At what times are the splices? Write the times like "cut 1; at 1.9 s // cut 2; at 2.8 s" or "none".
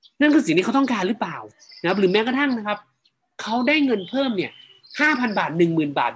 none